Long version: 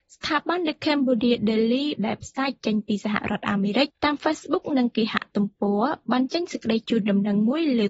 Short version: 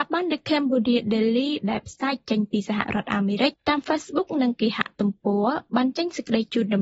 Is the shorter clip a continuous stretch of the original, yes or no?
yes